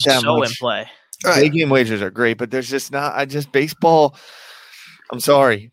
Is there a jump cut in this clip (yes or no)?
no